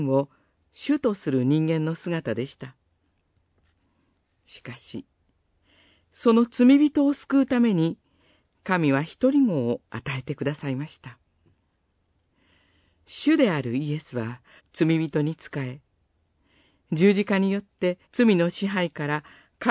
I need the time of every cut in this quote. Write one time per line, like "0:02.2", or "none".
0:14.6
0:18.0